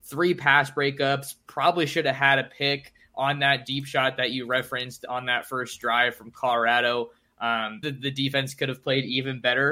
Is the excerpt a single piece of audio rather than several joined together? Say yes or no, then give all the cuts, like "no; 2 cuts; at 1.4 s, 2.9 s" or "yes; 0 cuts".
no; 1 cut; at 7.8 s